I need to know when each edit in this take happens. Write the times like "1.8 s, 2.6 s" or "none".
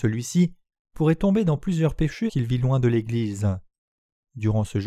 2.3 s